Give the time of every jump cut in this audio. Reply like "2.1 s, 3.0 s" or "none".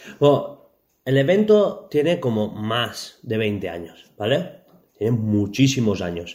none